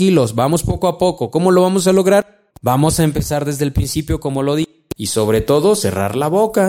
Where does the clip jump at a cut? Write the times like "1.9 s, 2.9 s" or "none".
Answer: 2.5 s, 4.9 s